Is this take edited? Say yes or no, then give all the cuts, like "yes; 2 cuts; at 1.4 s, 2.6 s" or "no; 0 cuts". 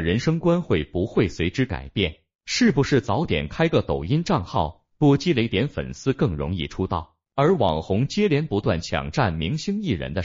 yes; 2 cuts; at 2.4 s, 7.2 s